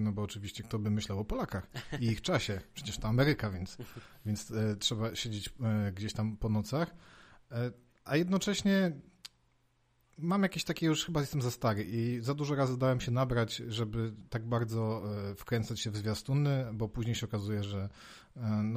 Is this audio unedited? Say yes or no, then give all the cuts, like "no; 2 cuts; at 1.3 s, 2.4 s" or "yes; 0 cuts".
yes; 0 cuts